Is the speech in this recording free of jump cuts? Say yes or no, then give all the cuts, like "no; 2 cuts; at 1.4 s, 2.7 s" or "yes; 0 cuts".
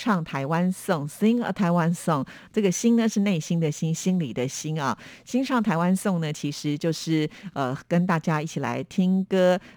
yes; 0 cuts